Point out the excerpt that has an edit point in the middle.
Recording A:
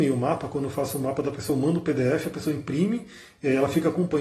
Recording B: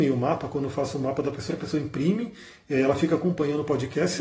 B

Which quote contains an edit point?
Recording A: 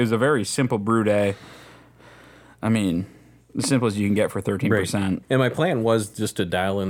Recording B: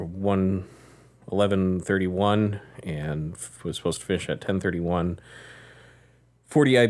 A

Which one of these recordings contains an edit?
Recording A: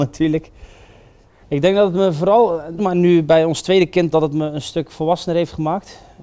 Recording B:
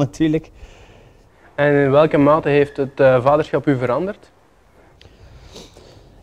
A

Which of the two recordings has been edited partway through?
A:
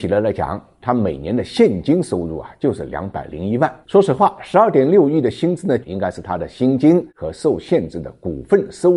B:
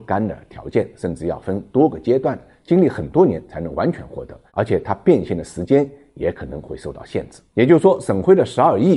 A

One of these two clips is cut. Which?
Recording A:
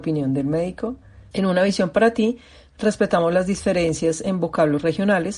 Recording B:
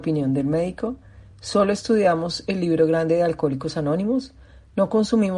A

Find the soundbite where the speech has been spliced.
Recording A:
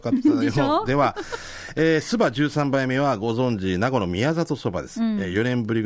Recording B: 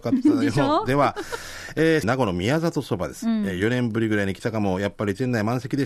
B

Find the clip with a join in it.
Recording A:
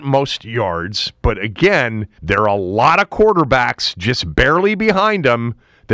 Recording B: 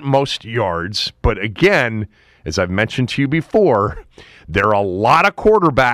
A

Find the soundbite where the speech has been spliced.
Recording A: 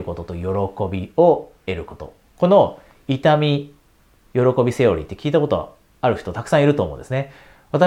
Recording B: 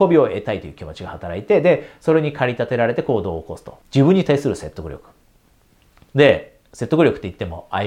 B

